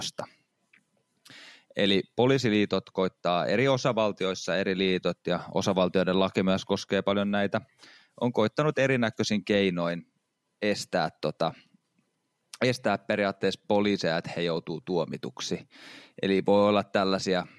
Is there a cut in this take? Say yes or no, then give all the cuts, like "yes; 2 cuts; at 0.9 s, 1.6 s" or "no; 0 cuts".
no; 0 cuts